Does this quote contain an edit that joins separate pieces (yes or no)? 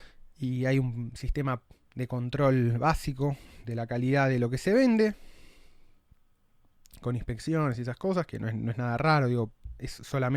no